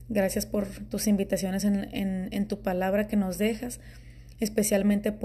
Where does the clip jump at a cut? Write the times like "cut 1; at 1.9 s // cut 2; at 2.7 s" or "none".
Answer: none